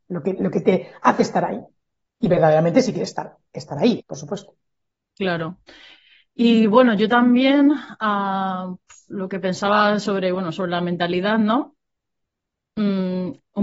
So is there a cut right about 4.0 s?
yes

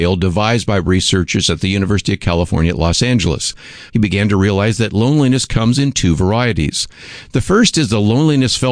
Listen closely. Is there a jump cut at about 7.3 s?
no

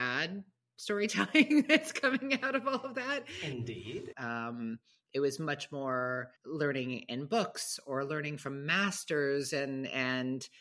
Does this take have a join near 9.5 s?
no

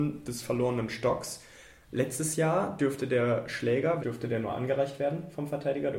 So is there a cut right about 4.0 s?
yes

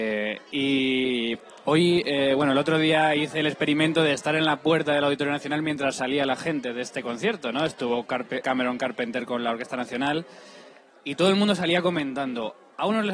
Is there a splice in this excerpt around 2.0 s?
no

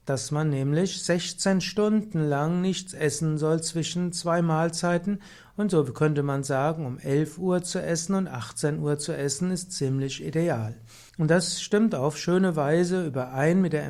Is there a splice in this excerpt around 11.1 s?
yes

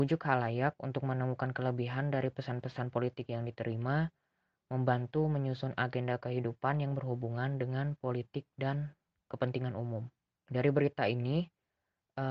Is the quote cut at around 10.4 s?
yes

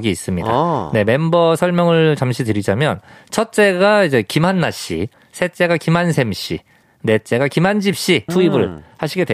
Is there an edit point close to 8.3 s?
yes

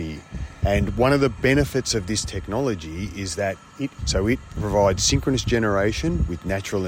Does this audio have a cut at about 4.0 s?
yes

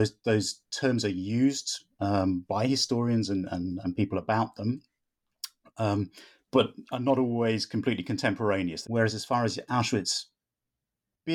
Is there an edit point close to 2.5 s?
no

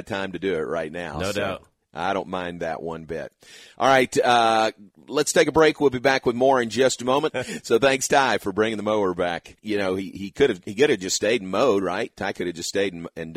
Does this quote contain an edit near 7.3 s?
yes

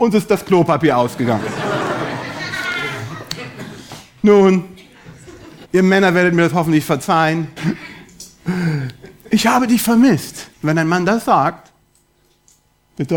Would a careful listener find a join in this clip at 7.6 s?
yes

